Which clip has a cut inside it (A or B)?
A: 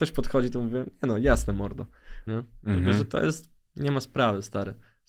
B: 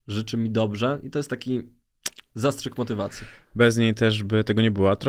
A